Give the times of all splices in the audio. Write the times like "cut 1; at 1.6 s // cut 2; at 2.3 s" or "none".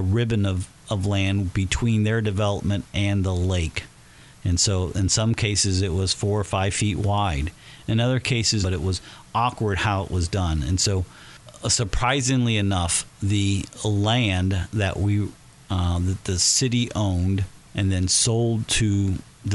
cut 1; at 8.6 s // cut 2; at 17.6 s